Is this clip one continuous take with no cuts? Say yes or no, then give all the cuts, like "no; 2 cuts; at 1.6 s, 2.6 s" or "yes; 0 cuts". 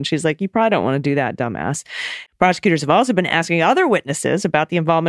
no; 1 cut; at 2.3 s